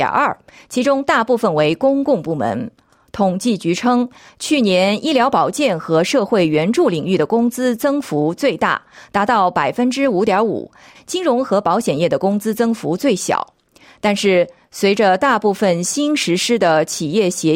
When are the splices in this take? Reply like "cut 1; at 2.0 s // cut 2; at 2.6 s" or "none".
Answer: cut 1; at 10.9 s